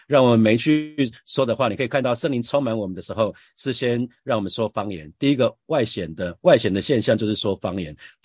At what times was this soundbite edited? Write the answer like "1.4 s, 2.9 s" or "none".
none